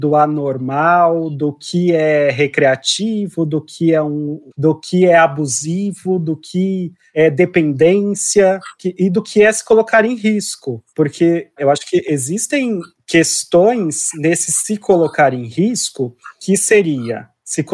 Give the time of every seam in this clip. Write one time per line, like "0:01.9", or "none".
0:04.5